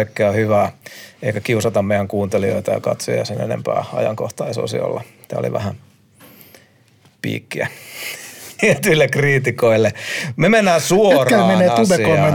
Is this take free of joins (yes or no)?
no